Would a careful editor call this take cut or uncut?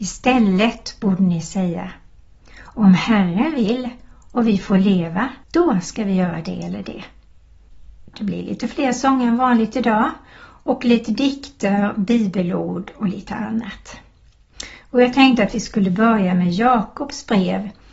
cut